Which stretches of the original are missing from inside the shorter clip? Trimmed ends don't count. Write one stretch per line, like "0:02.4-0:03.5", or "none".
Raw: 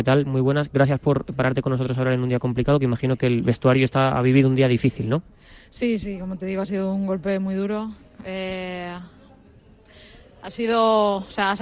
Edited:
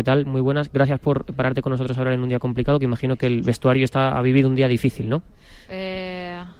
0:05.7-0:08.2